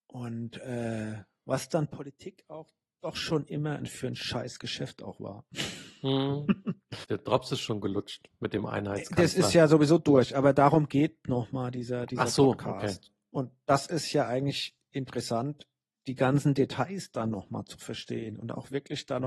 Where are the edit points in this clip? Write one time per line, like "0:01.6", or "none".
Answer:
0:07.0